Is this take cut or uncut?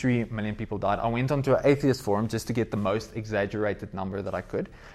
uncut